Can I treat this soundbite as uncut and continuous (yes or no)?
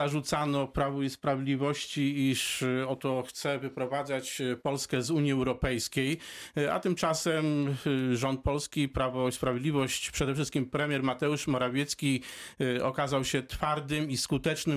yes